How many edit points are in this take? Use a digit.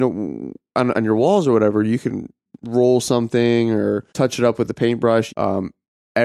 3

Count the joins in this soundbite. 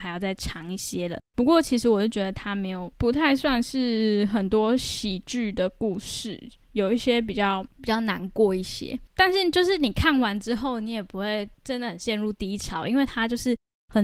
2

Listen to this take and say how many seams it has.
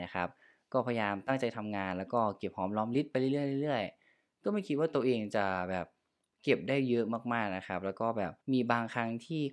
1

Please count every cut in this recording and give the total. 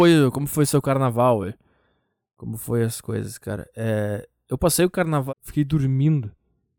1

